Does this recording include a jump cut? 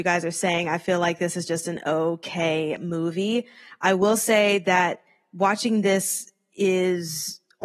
no; 0 cuts

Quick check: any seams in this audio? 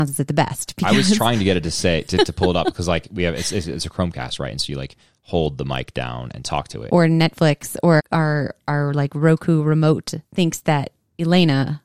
yes; 2 cuts; at 6.9 s, 8.0 s

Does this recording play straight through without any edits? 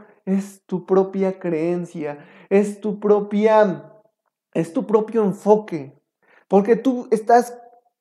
yes; 0 cuts

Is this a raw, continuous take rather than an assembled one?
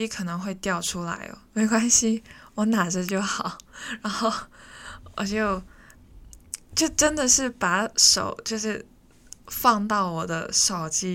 no; 1 cut; at 1.5 s

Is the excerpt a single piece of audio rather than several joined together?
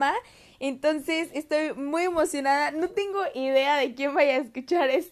yes; 0 cuts

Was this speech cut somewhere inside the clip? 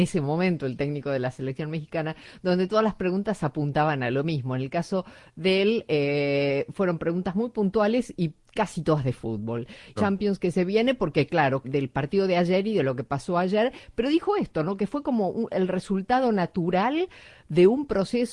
yes; 2 cuts; at 10.0 s, 11.6 s

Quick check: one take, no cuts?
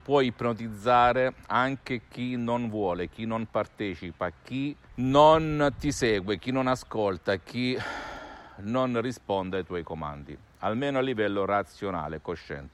no; 1 cut; at 4.8 s

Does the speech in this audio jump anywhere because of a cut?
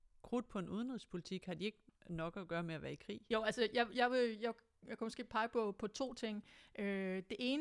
no; 0 cuts

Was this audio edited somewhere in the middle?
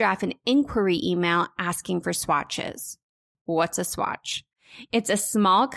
no; 0 cuts

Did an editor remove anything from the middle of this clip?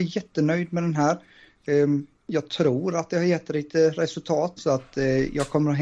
yes; 2 cuts; at 2.1 s, 4.6 s

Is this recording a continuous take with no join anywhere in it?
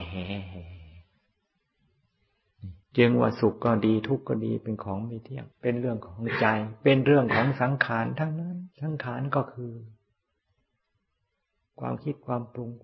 no; 3 cuts; at 2.8 s, 5.5 s, 8.7 s

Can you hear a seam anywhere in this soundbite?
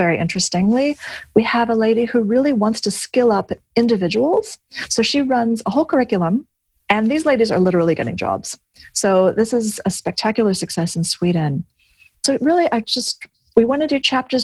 no; 0 cuts

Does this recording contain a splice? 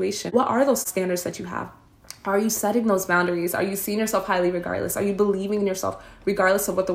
no; 0 cuts

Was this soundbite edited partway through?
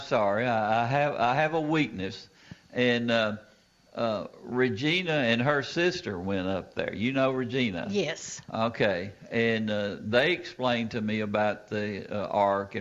no; 0 cuts

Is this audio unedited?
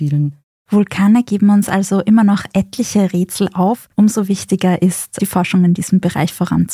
yes; 0 cuts

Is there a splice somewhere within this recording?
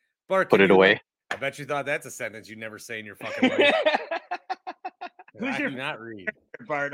yes; 2 cuts; at 1.2 s, 5.3 s

